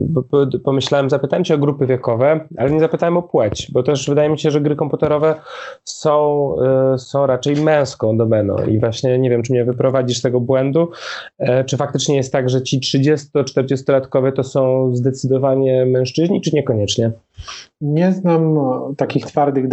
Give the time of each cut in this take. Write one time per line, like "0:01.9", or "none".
none